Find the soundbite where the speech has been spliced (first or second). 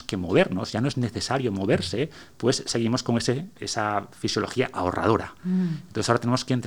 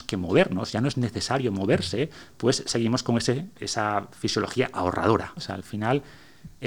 second